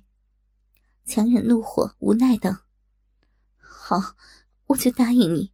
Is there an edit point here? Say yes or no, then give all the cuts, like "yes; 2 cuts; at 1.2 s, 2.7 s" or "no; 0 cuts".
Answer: no; 0 cuts